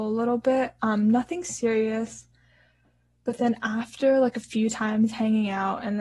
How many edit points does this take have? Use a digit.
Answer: 0